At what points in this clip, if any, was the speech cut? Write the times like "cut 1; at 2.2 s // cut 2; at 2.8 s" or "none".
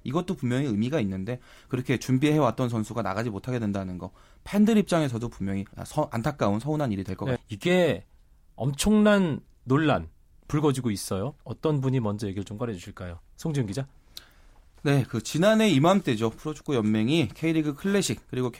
cut 1; at 5.7 s // cut 2; at 7.4 s // cut 3; at 11.4 s